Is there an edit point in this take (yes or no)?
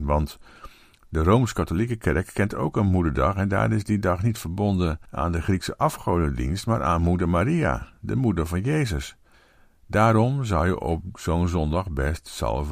no